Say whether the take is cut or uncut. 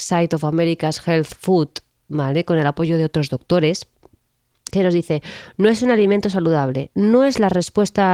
uncut